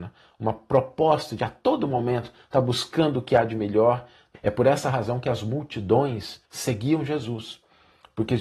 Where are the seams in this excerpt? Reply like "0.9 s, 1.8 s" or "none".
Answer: 4.3 s, 6.4 s